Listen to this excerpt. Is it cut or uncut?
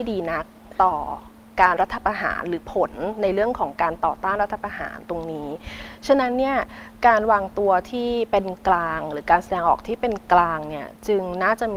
cut